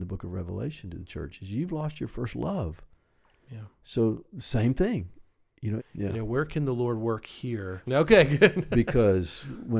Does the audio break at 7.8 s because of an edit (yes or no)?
yes